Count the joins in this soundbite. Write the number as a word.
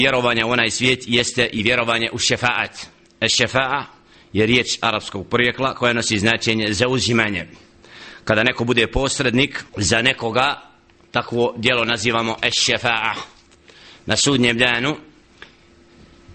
one